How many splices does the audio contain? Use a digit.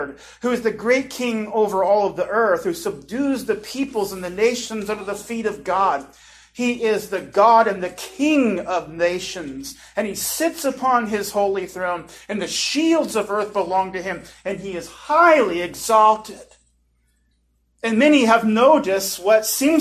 0